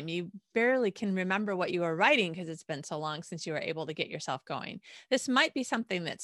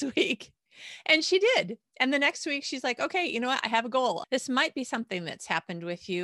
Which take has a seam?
second; 1 cut; at 4.2 s

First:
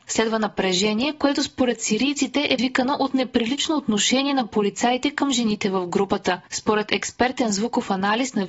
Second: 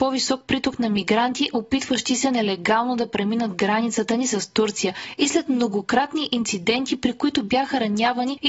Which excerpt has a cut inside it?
first; 2 cuts; at 2.6 s, 6.5 s

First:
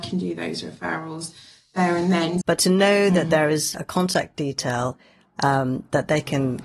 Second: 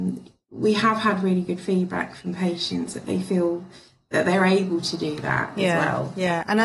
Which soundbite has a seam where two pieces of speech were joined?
first; 1 cut; at 2.4 s

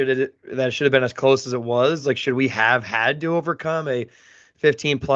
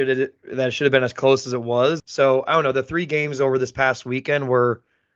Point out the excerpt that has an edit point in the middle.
second; 1 cut; at 2.0 s

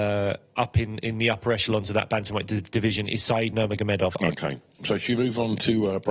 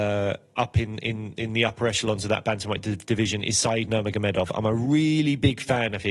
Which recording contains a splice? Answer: first; 2 cuts; at 1.0 s, 4.2 s

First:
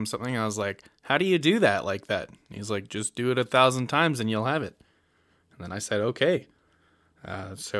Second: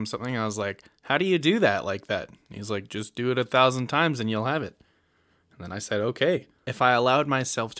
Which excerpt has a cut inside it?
second; 1 cut; at 6.6 s

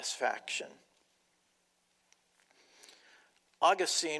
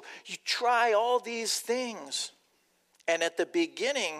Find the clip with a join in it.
second; 1 cut; at 2.9 s

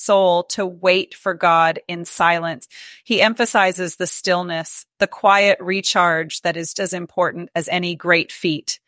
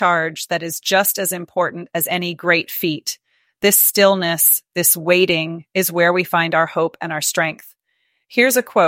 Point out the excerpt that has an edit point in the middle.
first; 1 cut; at 6.7 s

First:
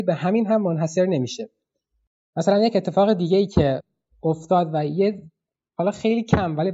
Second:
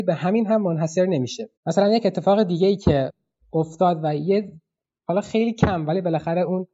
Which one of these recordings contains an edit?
second; 1 cut; at 1.6 s

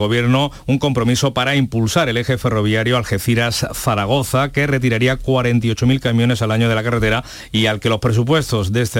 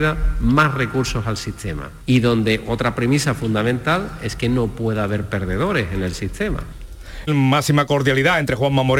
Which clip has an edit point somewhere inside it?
second; 1 cut; at 7.3 s

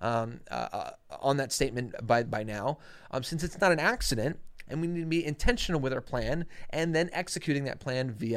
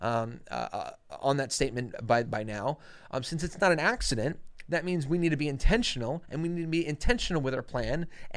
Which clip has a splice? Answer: first; 1 cut; at 4.7 s

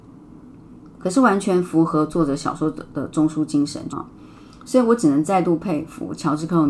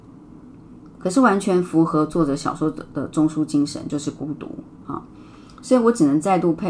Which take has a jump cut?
first; 1 cut; at 3.9 s

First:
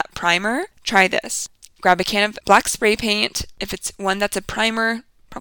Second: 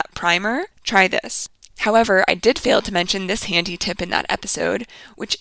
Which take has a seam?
second; 1 cut; at 1.7 s

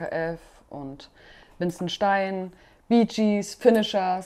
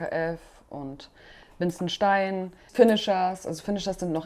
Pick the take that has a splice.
second; 1 cut; at 2.7 s

